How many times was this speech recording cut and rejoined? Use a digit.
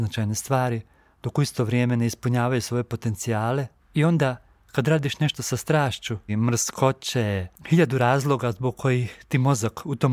2